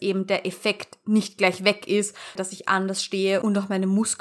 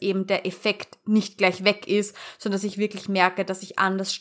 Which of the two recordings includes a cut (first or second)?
first